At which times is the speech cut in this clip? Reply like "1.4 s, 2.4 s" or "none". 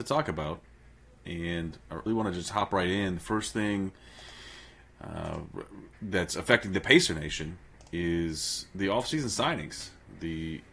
2.1 s